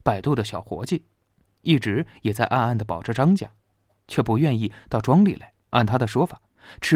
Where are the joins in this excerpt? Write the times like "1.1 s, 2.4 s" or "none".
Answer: 5.6 s